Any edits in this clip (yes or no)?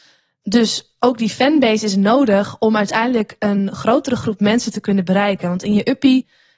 no